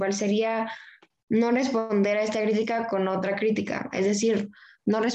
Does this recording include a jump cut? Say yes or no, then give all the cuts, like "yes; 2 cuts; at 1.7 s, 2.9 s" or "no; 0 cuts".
no; 0 cuts